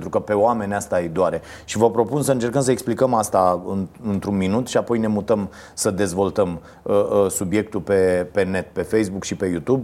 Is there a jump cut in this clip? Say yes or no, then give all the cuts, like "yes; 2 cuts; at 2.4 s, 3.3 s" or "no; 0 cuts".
no; 0 cuts